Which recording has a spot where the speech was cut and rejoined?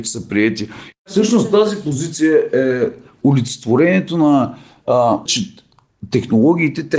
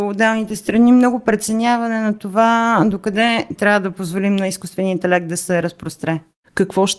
first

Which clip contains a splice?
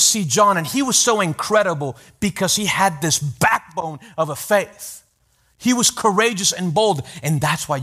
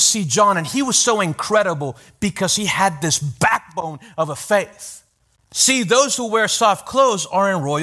second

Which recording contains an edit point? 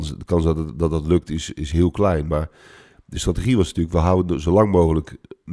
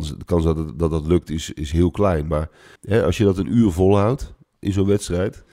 second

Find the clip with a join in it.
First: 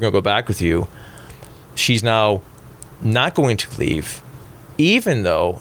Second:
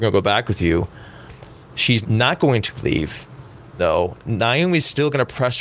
second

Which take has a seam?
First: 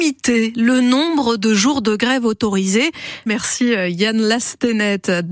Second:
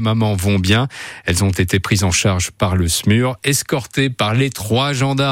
first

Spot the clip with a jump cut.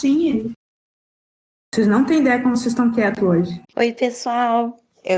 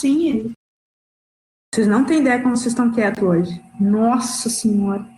first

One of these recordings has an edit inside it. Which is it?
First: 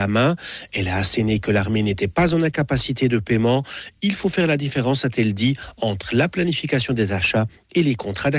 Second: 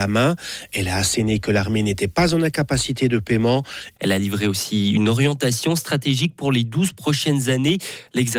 second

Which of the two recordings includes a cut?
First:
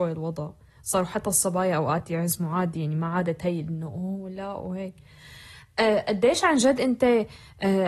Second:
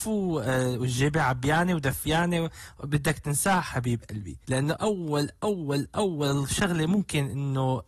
second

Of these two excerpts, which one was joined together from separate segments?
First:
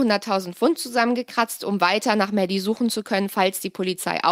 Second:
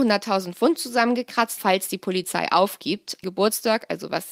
second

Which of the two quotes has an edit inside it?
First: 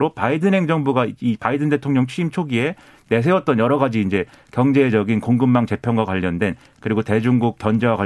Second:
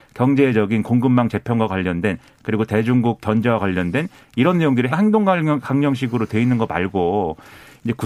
second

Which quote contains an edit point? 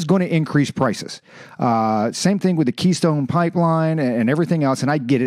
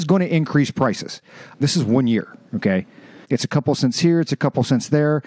second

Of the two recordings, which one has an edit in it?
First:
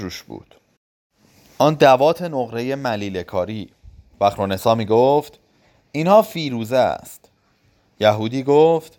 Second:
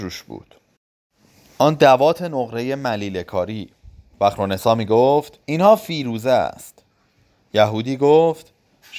second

